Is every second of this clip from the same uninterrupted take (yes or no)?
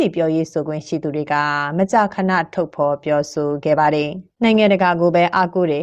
no